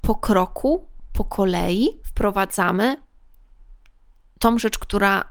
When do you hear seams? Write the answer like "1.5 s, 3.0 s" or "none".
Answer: none

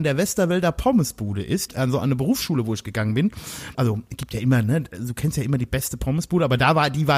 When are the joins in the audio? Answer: 1.7 s, 3.7 s

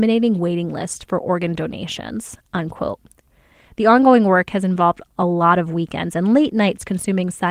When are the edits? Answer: none

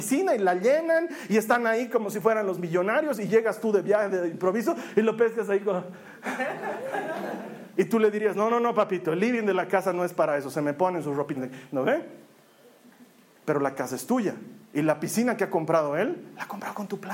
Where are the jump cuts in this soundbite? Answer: 11.3 s, 14.6 s

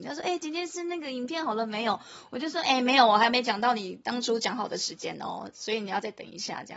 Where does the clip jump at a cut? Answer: none

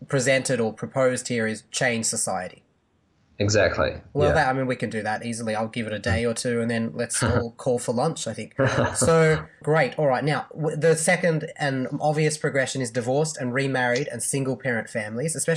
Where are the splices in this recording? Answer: none

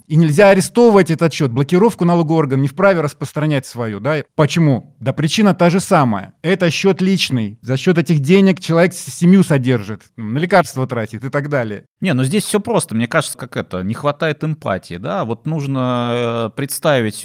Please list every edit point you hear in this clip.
11.9 s, 13.3 s

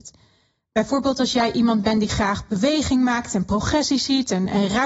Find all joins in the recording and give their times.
none

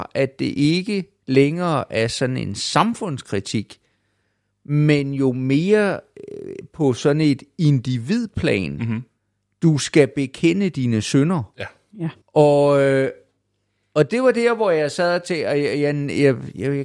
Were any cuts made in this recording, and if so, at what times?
12.2 s

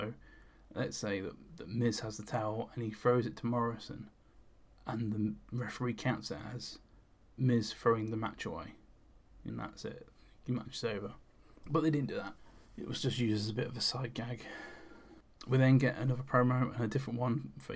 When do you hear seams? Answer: 9.5 s

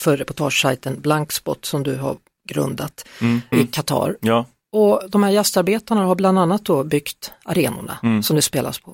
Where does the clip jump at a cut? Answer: 3.5 s

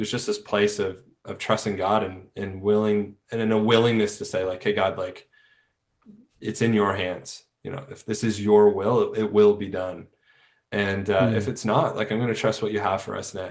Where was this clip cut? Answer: none

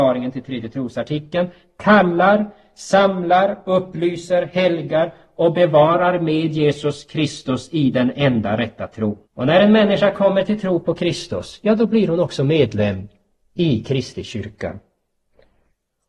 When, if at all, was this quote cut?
9.2 s

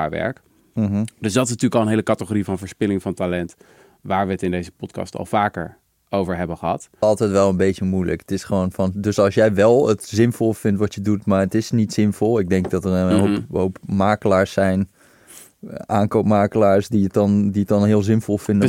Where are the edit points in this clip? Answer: 7.0 s

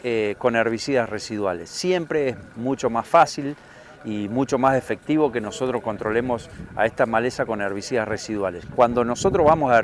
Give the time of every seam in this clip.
none

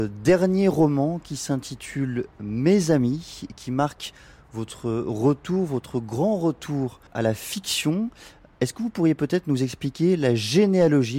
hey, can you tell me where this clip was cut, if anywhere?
7.1 s

